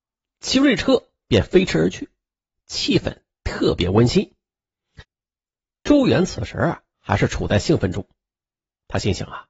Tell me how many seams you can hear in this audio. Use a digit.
2